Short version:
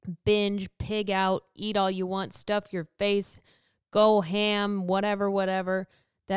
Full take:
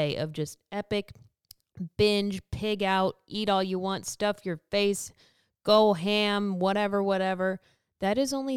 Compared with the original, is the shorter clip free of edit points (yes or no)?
yes